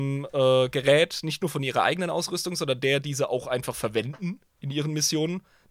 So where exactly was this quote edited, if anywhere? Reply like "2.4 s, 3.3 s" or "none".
none